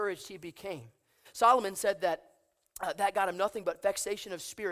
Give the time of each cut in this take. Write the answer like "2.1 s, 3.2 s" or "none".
1.3 s

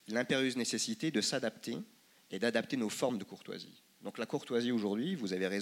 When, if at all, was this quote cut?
none

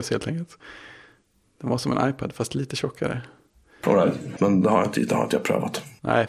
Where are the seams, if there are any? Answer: 4.4 s

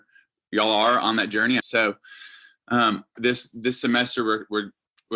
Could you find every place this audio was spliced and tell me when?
1.6 s, 3.2 s

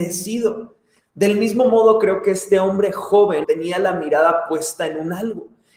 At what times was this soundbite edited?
1.0 s, 3.4 s

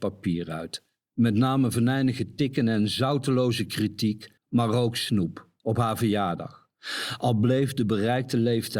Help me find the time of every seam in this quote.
1.0 s, 4.4 s

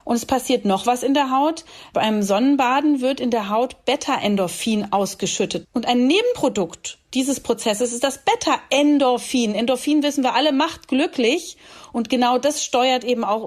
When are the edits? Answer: 5.6 s

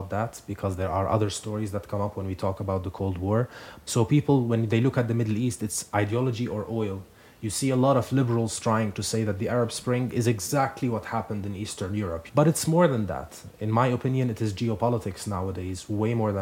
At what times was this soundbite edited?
3.8 s, 12.3 s

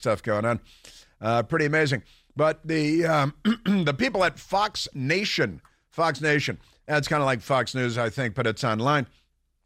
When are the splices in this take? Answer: none

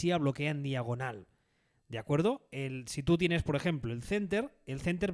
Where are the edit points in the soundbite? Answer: none

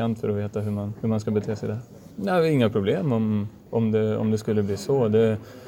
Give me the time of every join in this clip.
2.1 s

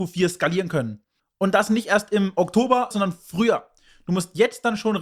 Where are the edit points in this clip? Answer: 1.2 s, 2.9 s

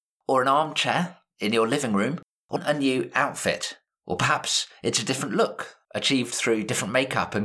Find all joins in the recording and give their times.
2.6 s

